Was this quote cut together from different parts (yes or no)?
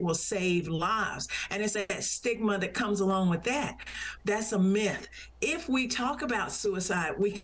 yes